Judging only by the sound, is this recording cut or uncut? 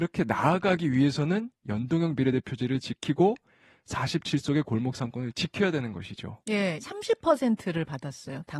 cut